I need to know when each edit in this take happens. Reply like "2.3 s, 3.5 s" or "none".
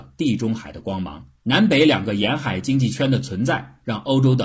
1.4 s

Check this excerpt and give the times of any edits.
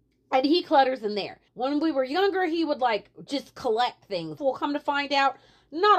1.5 s, 4.4 s

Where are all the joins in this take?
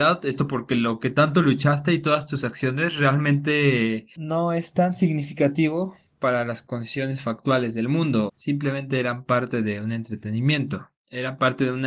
8.3 s

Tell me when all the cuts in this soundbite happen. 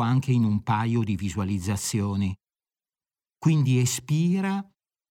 3.3 s

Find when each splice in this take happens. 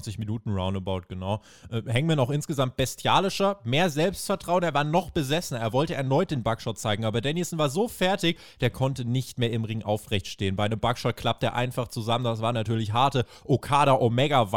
none

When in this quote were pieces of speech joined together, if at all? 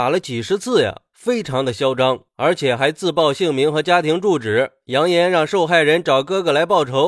none

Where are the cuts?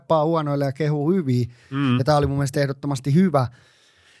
none

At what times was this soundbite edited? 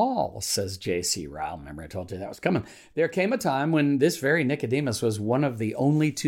none

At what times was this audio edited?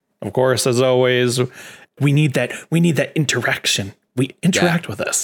2.0 s

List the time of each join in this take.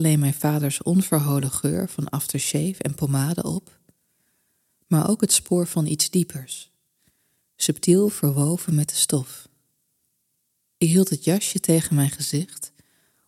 none

